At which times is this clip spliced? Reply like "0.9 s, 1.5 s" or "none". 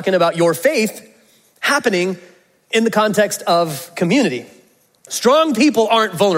5.1 s